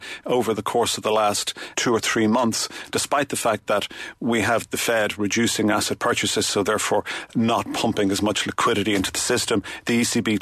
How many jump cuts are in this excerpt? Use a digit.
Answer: 1